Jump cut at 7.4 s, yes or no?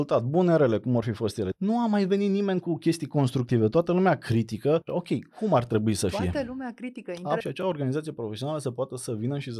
yes